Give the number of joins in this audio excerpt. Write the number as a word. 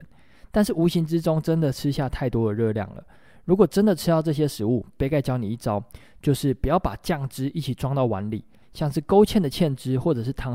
one